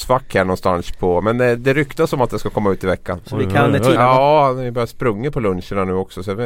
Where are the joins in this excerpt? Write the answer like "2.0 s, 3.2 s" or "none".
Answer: 1.6 s, 4.0 s